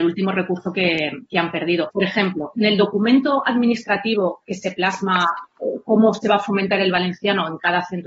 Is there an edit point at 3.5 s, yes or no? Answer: no